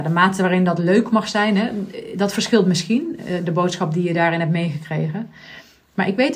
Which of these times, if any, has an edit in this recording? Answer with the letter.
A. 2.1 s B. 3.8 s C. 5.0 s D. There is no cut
D